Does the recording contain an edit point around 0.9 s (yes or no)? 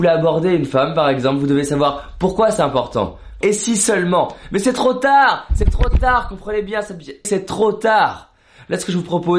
no